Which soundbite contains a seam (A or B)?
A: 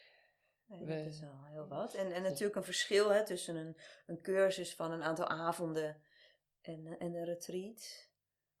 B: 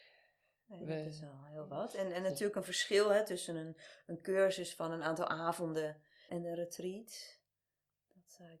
B